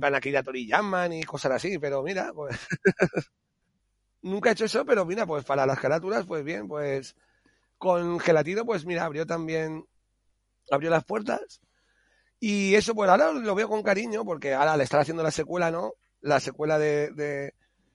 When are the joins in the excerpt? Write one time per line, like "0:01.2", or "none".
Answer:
none